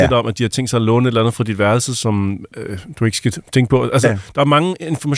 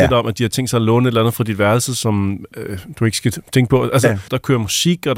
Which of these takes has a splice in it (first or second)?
second